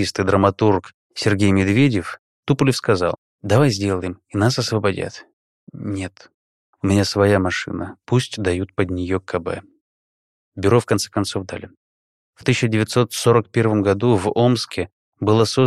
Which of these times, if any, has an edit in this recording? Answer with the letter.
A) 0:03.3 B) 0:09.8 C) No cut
A